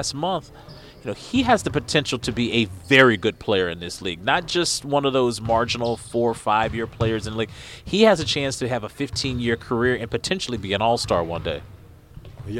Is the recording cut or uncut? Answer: uncut